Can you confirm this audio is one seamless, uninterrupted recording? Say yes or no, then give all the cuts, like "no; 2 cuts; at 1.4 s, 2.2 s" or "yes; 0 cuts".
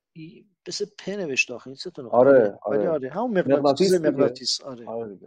yes; 0 cuts